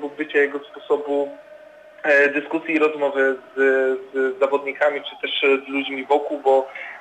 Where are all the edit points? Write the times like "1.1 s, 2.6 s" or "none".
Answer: none